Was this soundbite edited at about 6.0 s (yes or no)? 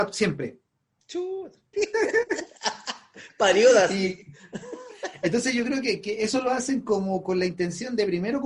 no